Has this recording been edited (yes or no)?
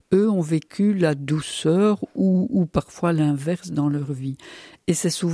no